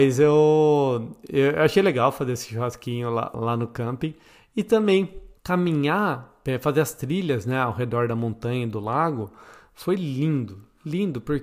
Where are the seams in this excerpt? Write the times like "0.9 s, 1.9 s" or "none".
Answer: 3.3 s, 5.4 s